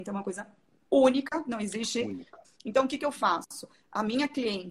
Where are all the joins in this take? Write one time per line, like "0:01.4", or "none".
0:02.4